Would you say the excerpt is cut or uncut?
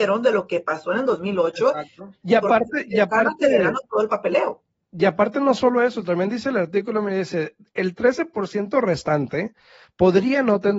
cut